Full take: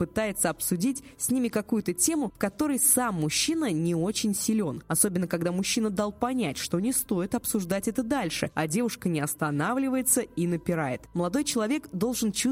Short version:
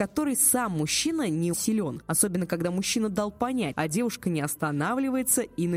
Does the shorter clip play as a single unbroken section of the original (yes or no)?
no